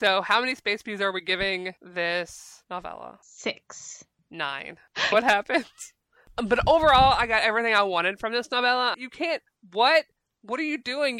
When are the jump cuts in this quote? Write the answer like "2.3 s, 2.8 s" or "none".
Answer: 5.1 s, 8.9 s